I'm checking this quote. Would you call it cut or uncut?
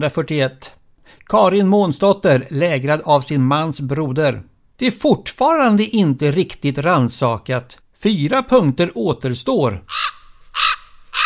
cut